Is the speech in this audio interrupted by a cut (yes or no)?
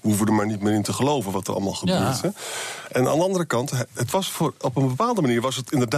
no